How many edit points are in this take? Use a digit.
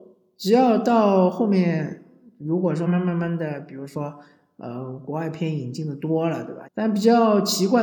2